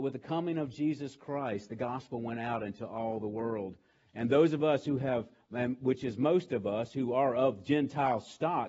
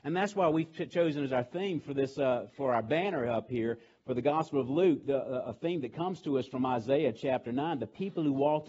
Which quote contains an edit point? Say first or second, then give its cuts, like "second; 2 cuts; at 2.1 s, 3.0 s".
second; 1 cut; at 2.5 s